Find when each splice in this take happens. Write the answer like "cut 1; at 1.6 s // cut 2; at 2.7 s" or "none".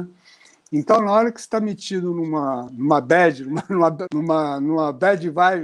cut 1; at 2.7 s // cut 2; at 4.1 s